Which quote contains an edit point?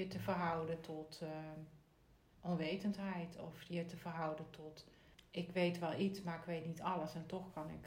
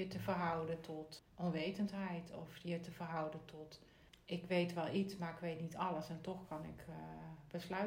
second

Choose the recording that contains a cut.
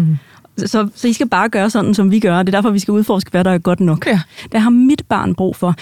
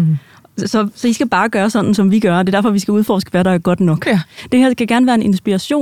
first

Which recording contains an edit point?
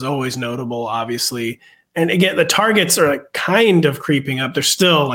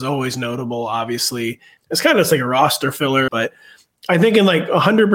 second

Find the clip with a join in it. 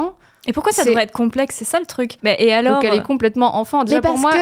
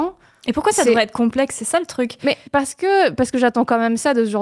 first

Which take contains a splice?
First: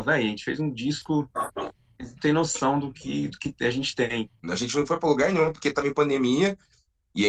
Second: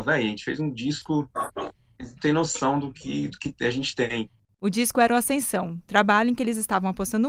first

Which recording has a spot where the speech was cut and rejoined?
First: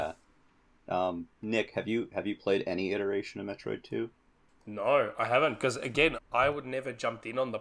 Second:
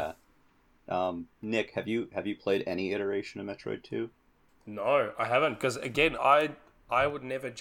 first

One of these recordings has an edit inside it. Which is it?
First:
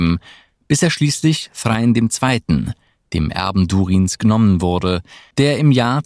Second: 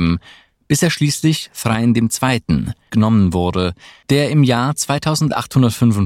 second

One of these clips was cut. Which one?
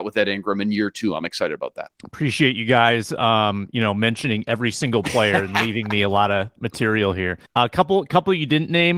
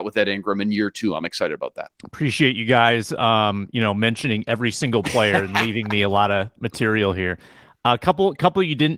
first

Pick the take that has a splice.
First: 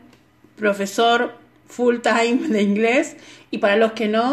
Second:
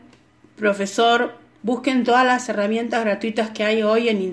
second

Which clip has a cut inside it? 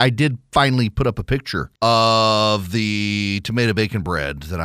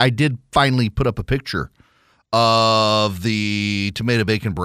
first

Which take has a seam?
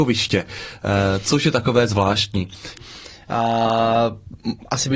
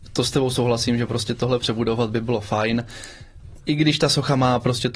first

